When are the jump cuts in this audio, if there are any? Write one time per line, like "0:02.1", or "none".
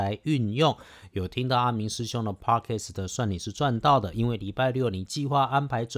none